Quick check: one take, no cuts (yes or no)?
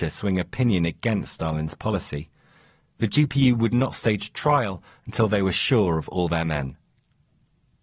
yes